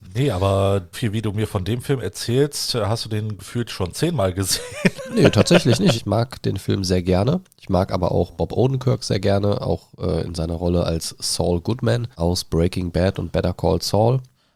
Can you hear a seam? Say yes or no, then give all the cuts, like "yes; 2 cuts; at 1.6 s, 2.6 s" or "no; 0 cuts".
yes; 3 cuts; at 0.9 s, 5.9 s, 12.1 s